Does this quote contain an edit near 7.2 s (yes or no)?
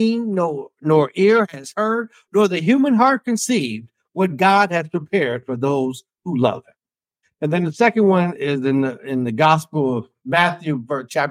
yes